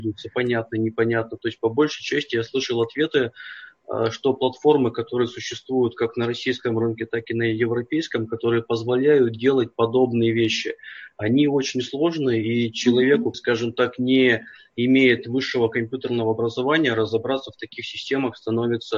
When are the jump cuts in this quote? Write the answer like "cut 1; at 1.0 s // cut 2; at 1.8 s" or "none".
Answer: cut 1; at 13.3 s